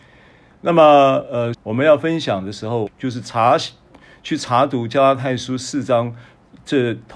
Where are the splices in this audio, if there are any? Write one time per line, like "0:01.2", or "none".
0:01.5
0:02.9

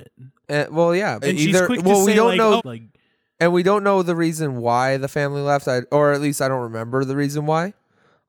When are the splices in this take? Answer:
0:01.2
0:02.6

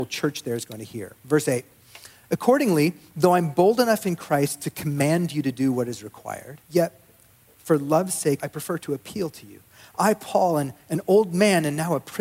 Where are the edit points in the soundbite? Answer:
0:06.6
0:08.4

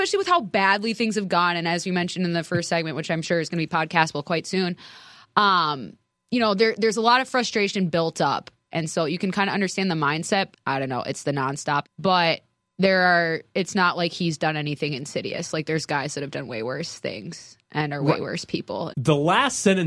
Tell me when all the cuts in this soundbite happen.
0:10.5
0:11.8
0:18.9

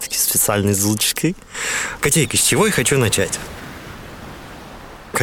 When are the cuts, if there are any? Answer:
0:02.0

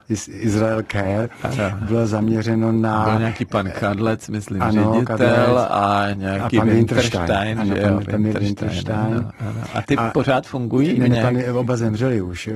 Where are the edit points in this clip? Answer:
none

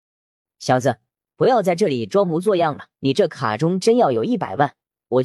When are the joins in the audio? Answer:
0:02.9

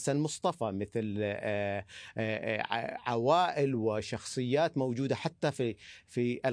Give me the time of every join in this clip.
none

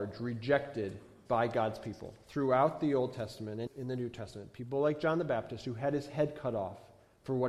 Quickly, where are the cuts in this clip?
0:03.7

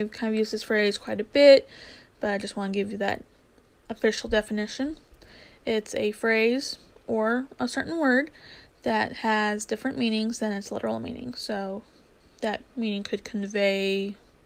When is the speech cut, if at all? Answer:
0:12.7

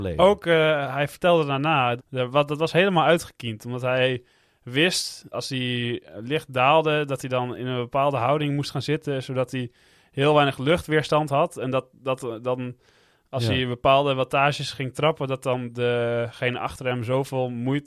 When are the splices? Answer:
0:02.0
0:05.3

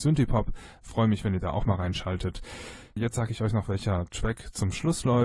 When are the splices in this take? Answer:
0:03.0

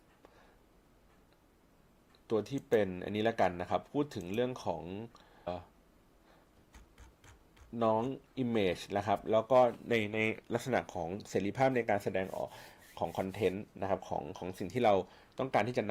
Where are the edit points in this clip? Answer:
0:05.5

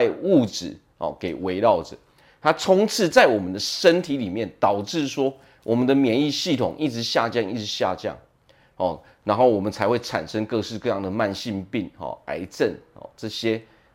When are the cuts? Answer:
none

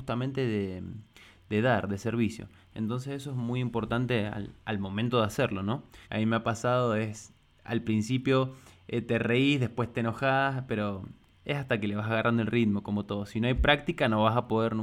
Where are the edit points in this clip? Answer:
0:06.0

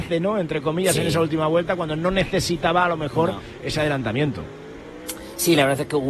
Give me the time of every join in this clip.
none

